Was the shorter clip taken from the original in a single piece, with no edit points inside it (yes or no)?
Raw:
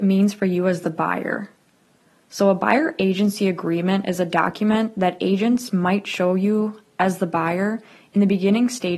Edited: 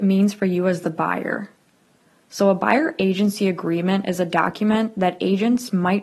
yes